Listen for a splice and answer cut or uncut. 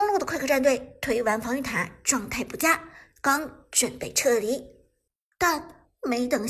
cut